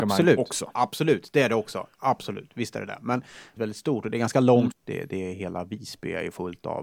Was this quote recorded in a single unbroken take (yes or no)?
no